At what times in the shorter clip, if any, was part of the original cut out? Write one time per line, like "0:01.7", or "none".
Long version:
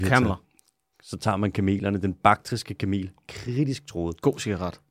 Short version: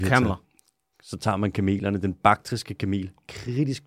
none